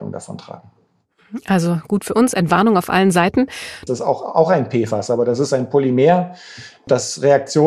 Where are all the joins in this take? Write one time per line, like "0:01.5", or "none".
0:03.9